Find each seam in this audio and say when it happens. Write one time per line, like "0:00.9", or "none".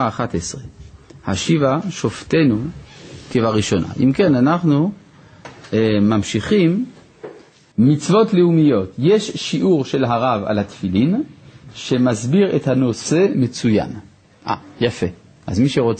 0:07.7

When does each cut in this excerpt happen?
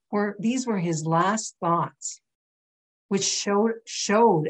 none

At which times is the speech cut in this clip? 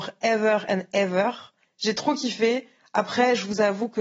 0:01.6

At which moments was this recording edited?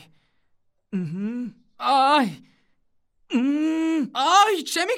none

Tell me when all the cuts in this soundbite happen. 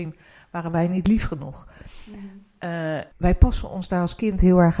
0:03.1

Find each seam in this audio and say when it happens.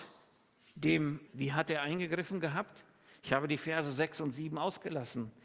0:01.3

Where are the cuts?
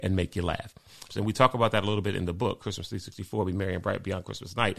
0:01.1

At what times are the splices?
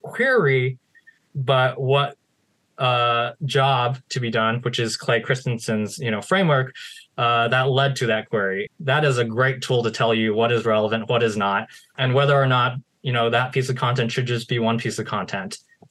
0:08.7
0:11.9

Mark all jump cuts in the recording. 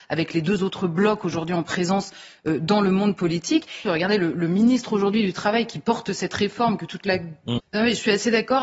0:03.8
0:07.6

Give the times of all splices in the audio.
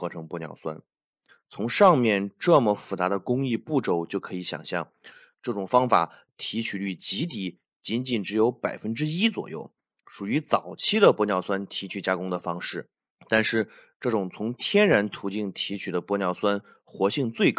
0:01.3

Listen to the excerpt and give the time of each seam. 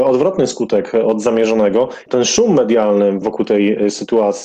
0:02.1
0:03.2

